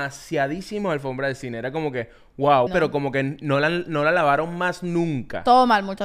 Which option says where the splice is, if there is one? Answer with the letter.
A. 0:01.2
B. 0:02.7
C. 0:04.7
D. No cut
B